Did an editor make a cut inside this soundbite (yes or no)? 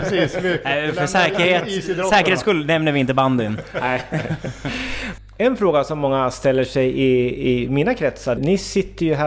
yes